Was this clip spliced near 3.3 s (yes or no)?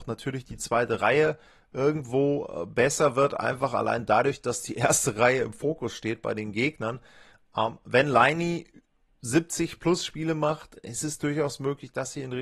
no